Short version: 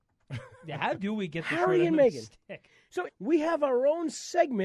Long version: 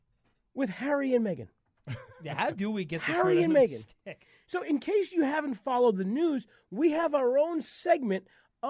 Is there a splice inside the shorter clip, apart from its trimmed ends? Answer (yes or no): yes